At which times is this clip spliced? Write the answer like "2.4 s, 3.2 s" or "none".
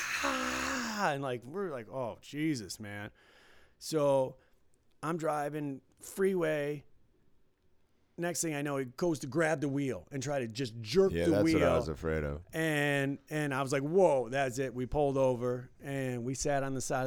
none